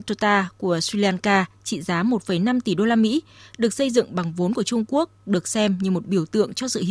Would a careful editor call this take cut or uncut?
uncut